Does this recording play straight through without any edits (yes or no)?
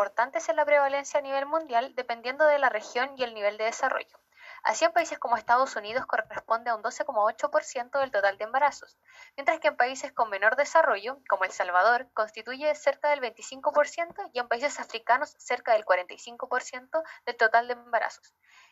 yes